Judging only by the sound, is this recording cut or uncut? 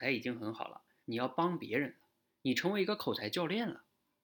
cut